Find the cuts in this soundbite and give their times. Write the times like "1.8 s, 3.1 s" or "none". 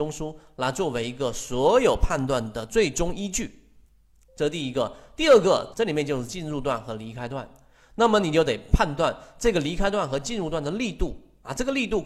5.7 s